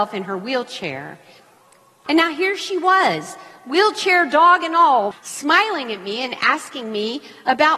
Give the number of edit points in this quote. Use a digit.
2